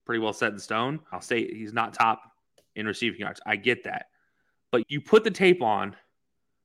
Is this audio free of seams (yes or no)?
no